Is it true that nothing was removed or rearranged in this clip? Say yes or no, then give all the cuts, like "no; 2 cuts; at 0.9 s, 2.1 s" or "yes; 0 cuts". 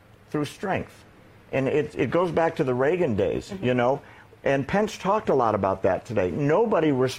yes; 0 cuts